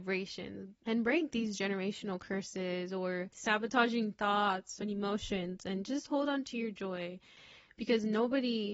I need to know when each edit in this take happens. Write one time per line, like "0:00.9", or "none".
none